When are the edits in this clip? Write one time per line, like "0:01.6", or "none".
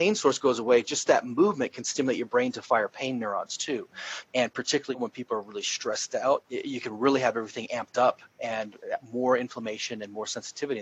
0:04.2
0:06.4